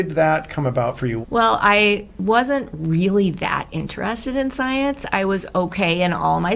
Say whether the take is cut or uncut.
cut